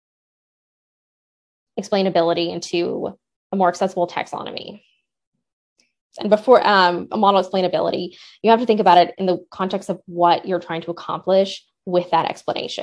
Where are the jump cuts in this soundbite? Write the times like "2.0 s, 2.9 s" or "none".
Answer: 6.0 s